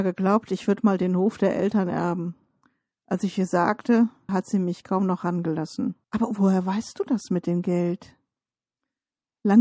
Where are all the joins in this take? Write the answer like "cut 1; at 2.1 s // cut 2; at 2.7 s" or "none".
cut 1; at 4.3 s // cut 2; at 6.0 s